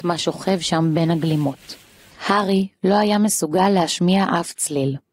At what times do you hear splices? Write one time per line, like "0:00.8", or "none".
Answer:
0:02.1